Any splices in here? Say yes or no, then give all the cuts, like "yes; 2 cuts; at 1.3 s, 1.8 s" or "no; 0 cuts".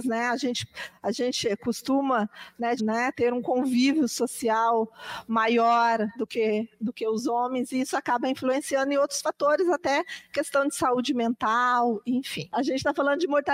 yes; 2 cuts; at 2.8 s, 6.2 s